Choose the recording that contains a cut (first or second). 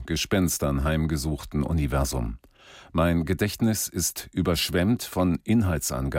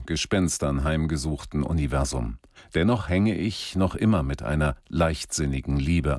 second